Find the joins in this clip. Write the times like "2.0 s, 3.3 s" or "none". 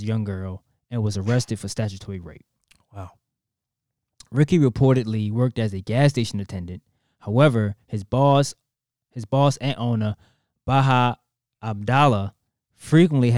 none